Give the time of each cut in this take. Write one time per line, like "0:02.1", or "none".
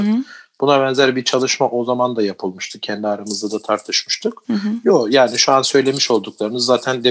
none